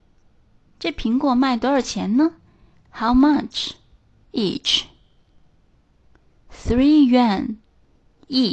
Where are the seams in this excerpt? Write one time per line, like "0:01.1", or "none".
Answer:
0:04.2